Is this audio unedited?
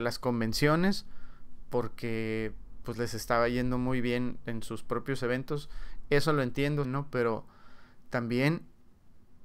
no; 1 cut; at 6.8 s

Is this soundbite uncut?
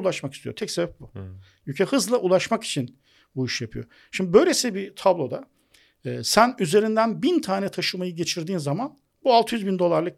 yes; 0 cuts

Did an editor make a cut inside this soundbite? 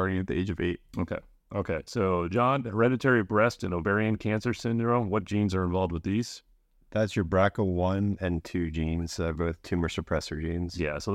no; 0 cuts

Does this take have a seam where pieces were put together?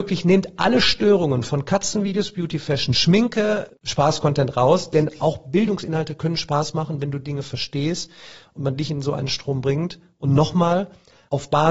no; 0 cuts

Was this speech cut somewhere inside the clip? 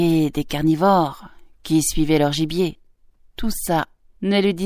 no; 0 cuts

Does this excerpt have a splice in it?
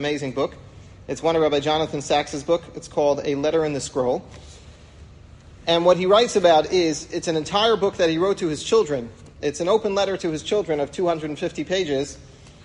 no; 0 cuts

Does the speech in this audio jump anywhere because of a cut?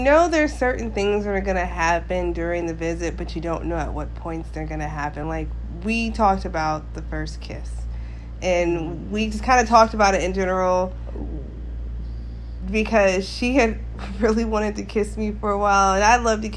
no; 0 cuts

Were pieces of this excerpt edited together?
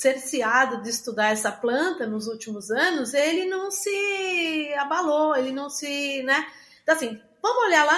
no; 0 cuts

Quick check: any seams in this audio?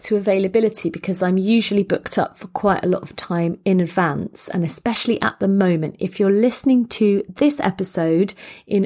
no; 0 cuts

